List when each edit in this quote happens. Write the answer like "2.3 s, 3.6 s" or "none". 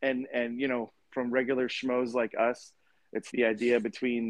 1.1 s, 3.3 s